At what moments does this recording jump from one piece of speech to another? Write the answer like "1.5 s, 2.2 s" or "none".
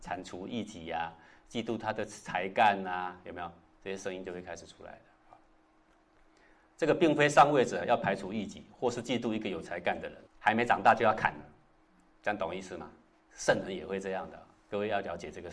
10.2 s, 13.3 s